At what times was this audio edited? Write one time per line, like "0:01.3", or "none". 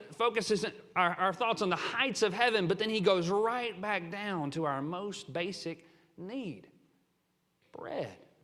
0:01.2